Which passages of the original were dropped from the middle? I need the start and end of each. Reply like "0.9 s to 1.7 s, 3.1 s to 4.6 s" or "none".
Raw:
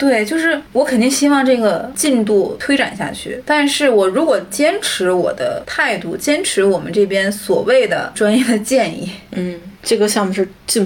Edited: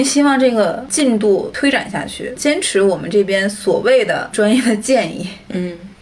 3.4 s to 6.2 s